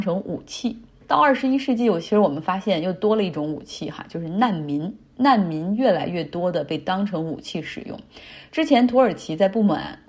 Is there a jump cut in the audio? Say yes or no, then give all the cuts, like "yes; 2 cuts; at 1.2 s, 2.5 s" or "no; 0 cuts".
yes; 1 cut; at 1.0 s